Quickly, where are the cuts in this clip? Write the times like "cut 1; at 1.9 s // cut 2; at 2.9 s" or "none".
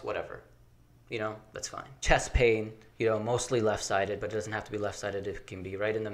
cut 1; at 2.0 s